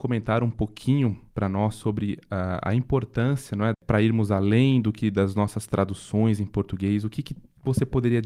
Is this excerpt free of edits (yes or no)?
no